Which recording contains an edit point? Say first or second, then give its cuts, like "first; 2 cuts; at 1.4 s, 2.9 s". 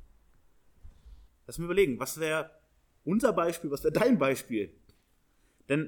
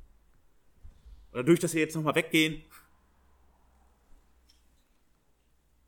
first; 1 cut; at 1.3 s